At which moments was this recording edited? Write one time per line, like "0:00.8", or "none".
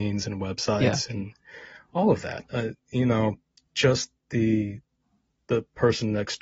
none